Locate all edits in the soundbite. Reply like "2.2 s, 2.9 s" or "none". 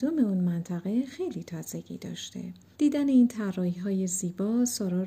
2.7 s

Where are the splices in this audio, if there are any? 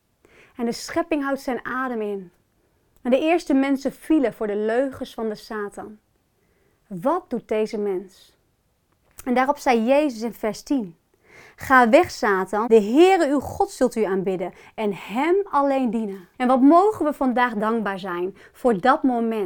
12.7 s, 16.3 s

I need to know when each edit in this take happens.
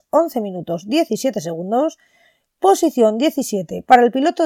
none

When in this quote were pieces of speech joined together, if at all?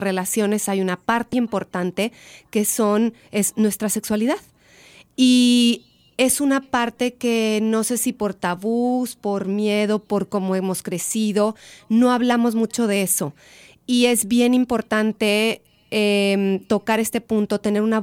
1.3 s

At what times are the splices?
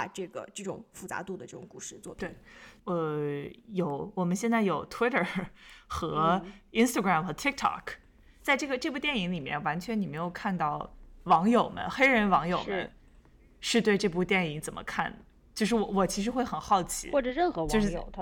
2.8 s

